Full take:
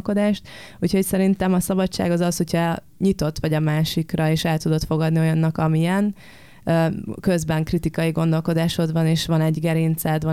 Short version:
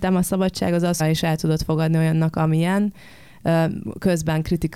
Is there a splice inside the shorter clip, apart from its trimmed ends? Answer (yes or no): yes